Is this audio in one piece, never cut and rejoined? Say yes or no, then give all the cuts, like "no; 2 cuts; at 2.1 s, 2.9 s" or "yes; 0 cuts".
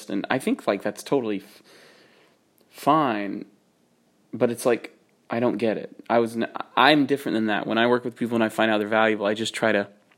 yes; 0 cuts